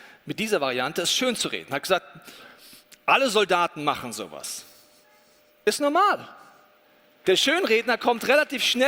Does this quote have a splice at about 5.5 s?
no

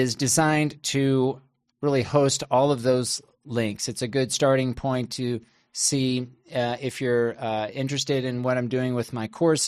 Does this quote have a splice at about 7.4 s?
no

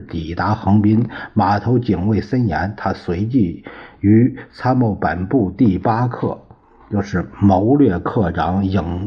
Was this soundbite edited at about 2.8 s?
no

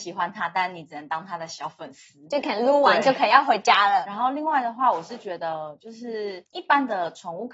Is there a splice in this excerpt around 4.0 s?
yes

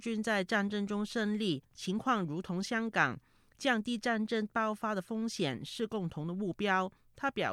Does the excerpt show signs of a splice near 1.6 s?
yes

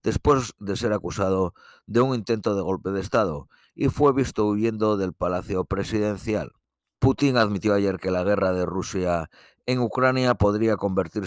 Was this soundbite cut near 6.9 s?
yes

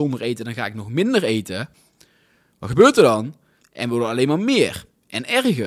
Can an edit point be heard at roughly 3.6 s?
yes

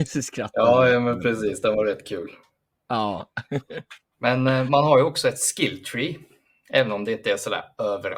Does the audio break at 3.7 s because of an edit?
no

